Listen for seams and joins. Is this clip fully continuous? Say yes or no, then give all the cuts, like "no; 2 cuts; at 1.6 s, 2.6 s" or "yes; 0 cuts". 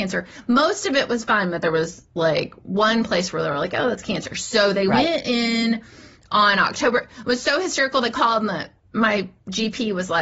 yes; 0 cuts